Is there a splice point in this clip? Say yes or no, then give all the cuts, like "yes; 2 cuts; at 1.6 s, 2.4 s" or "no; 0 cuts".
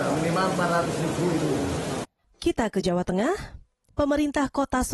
yes; 1 cut; at 2.2 s